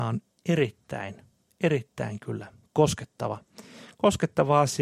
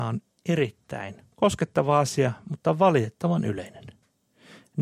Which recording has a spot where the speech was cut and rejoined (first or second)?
second